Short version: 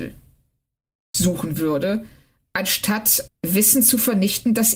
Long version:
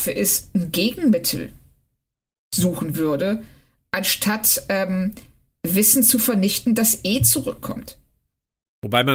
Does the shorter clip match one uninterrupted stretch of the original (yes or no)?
no